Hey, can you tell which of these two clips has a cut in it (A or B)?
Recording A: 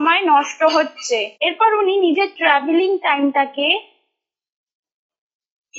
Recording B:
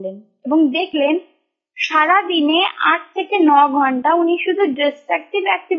A